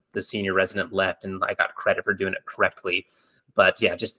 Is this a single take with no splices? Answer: yes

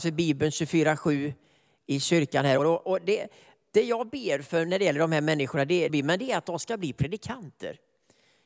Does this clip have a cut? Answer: yes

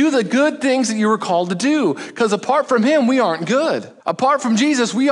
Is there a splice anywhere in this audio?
yes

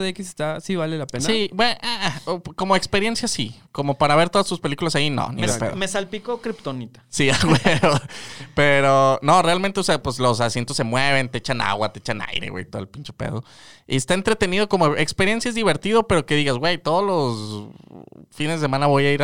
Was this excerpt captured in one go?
yes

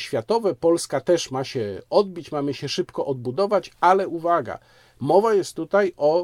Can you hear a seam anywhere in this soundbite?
no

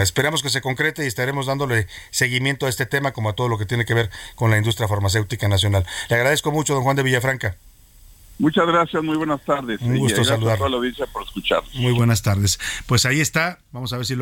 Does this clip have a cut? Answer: no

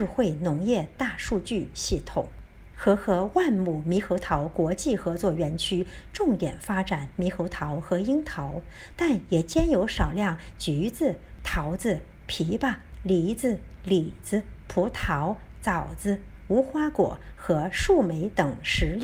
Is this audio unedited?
yes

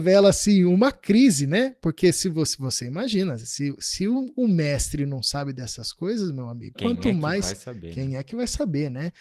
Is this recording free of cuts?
no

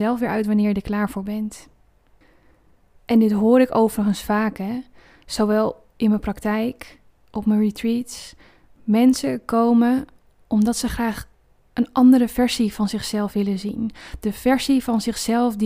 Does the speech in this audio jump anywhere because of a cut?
no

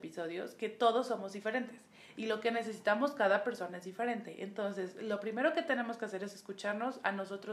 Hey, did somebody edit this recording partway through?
no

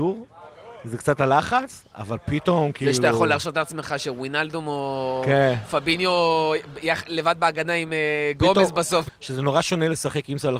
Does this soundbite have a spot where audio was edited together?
yes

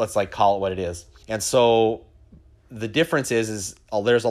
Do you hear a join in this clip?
yes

